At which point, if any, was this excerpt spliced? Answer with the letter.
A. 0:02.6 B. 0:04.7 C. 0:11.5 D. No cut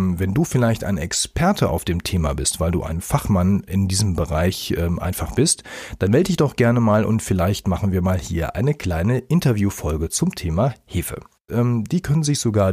C